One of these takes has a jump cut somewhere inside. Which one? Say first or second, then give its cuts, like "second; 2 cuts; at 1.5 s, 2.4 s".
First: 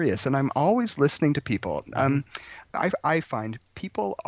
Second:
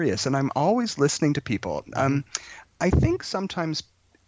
first; 1 cut; at 2.7 s